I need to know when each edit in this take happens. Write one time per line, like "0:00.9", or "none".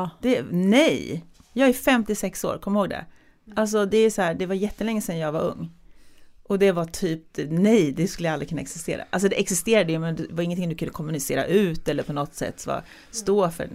none